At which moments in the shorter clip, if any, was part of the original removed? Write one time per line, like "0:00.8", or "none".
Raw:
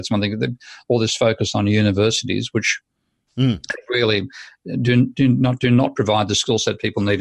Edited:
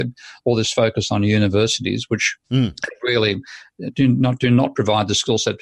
0:02.4
0:03.9

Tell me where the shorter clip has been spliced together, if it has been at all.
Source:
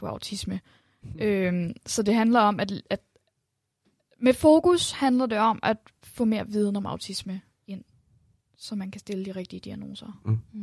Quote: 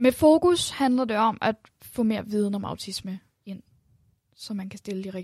none

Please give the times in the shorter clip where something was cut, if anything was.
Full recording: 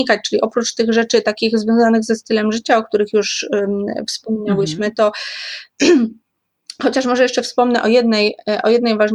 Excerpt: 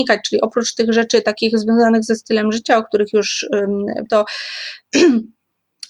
0:04.1

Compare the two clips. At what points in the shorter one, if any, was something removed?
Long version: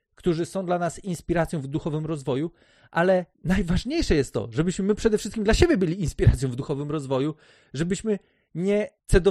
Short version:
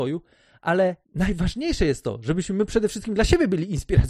none

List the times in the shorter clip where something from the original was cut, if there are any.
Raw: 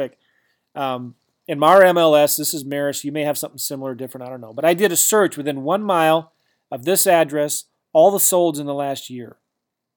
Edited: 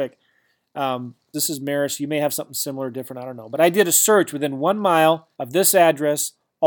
0:01.3
0:05.3

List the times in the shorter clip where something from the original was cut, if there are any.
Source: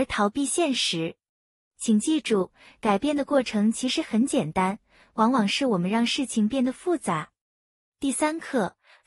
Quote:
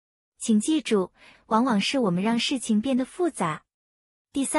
0:01.3

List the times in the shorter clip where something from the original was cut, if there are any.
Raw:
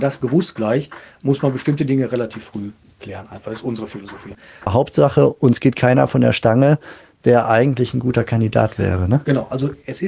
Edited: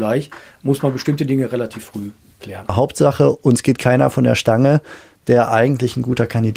0:02.7

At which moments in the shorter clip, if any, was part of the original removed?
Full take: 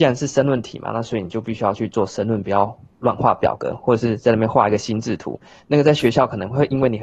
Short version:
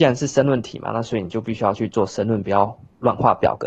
none

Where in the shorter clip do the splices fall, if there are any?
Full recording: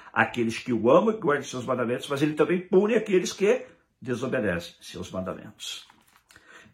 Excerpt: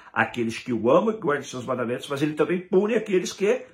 none

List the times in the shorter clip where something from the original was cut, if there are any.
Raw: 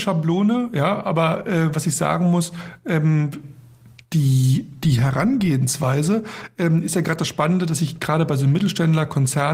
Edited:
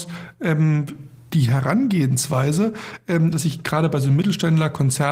0:01.3
0:03.3

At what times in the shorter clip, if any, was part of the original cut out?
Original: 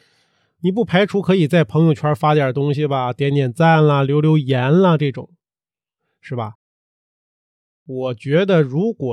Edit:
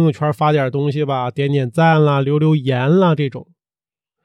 none

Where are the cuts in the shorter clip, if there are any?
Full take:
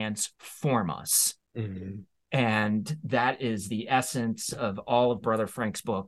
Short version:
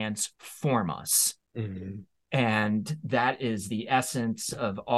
none

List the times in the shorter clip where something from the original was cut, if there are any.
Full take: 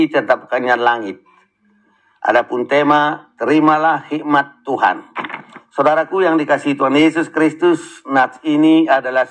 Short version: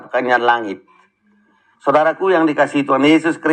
0:01.7

